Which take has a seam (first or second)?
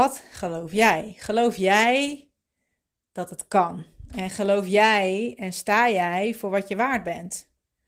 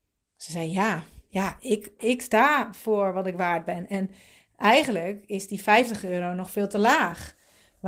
second